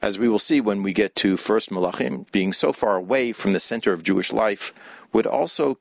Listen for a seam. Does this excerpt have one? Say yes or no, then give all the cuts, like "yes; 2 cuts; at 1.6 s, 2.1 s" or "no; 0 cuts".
yes; 1 cut; at 2.2 s